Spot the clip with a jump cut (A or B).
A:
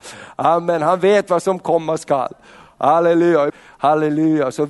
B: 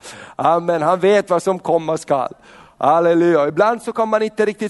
A